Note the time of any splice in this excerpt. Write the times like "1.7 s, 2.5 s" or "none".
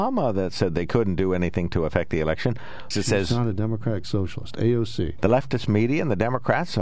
2.9 s, 5.2 s